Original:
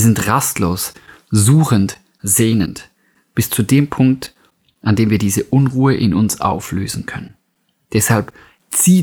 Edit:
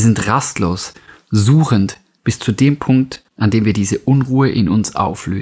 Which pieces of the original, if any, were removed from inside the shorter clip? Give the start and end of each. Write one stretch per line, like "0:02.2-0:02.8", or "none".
0:02.2-0:03.3
0:04.4-0:04.7